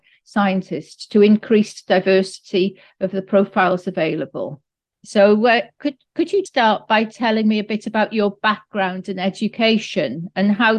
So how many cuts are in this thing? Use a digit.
2